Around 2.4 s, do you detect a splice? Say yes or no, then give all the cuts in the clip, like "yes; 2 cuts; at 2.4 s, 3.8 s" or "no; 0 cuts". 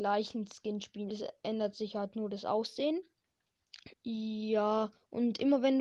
no; 2 cuts; at 1.1 s, 3.9 s